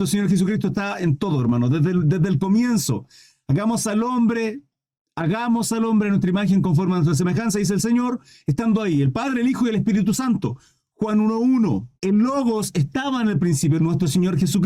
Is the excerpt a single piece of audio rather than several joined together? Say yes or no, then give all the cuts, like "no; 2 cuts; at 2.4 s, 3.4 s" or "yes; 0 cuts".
no; 2 cuts; at 12.0 s, 13.8 s